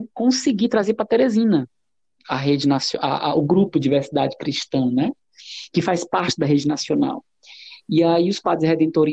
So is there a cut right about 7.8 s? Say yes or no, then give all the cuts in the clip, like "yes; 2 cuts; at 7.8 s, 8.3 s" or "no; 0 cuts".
no; 0 cuts